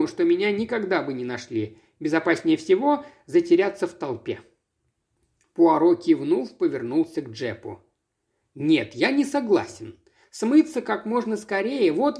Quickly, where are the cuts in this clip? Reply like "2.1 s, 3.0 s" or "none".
none